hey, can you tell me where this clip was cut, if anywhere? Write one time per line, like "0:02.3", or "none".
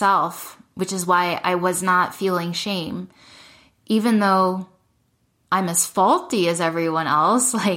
none